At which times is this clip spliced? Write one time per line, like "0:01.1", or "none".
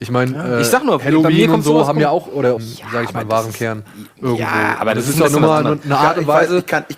0:02.6